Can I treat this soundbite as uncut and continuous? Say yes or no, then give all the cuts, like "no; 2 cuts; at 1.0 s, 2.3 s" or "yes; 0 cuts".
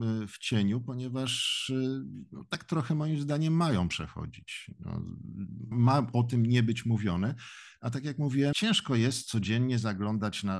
no; 2 cuts; at 5.7 s, 8.5 s